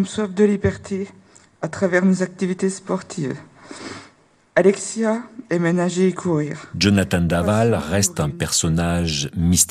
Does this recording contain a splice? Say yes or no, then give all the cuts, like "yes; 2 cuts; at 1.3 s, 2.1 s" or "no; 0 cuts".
no; 0 cuts